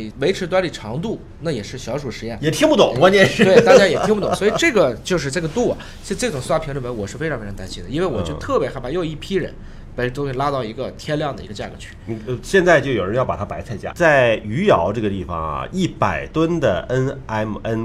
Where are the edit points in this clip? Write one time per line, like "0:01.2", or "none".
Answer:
0:13.9

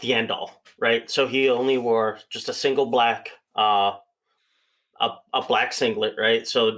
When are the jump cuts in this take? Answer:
none

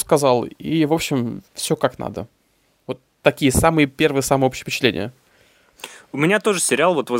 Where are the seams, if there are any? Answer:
0:01.5

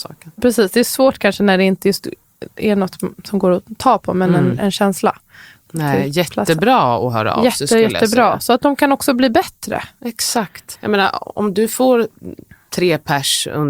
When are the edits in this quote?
none

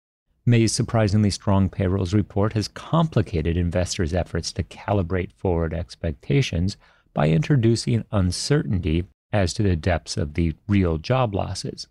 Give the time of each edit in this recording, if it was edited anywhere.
none

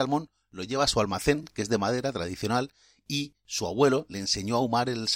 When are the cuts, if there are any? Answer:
none

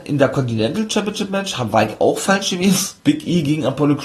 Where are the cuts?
0:03.0

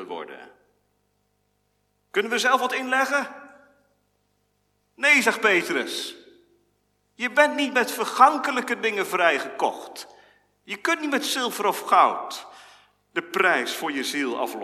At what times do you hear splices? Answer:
none

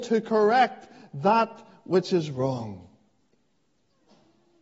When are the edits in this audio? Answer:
none

